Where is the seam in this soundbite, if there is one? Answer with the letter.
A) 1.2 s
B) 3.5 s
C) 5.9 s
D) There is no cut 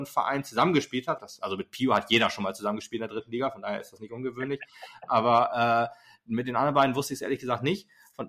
A